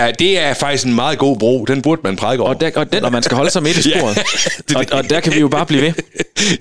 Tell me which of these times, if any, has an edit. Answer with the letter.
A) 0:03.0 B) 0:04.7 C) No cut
A